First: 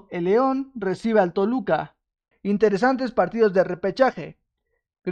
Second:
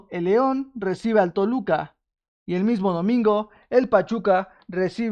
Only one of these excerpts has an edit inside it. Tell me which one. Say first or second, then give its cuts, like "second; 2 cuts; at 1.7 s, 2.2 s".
first; 1 cut; at 2.3 s